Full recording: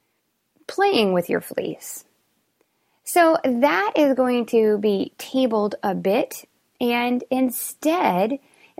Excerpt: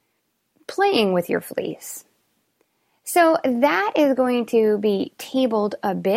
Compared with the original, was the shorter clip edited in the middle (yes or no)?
no